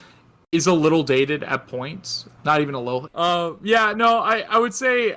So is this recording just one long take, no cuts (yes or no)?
no